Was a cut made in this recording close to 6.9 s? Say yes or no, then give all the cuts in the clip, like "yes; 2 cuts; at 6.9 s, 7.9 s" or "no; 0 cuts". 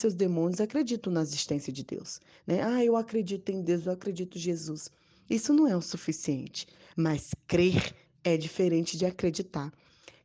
no; 0 cuts